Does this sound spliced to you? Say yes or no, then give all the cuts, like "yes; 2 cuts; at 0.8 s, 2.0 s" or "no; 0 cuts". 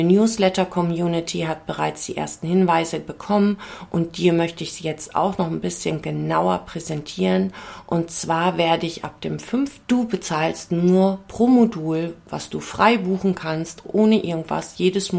yes; 2 cuts; at 9.8 s, 13.8 s